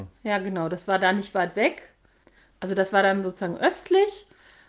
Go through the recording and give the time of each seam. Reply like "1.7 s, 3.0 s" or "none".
none